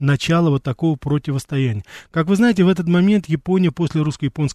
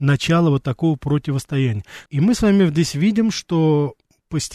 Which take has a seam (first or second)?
second